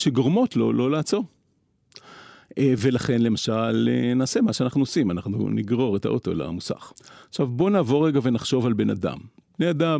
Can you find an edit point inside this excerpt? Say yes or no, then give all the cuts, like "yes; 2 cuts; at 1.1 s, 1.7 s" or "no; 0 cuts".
no; 0 cuts